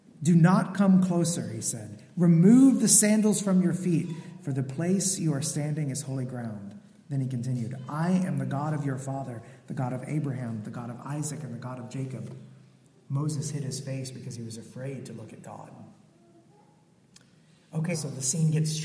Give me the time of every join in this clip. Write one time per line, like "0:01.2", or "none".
0:17.9